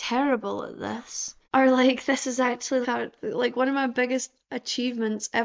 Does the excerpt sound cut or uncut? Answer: cut